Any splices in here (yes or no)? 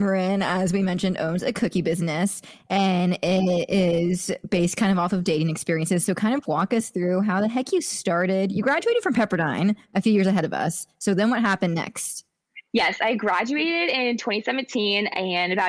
no